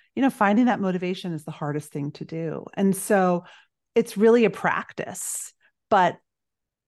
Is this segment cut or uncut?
uncut